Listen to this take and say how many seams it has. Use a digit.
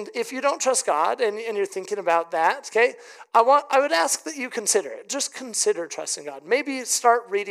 0